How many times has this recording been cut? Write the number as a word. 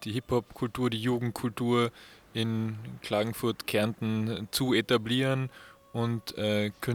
zero